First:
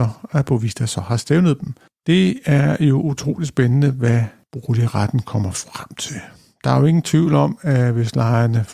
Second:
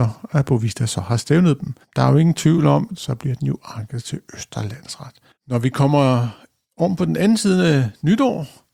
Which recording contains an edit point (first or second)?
second